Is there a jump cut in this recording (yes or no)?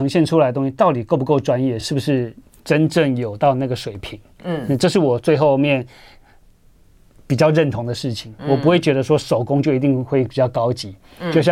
no